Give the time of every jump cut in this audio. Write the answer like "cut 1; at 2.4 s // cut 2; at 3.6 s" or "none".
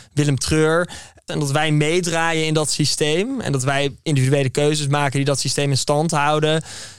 cut 1; at 1.3 s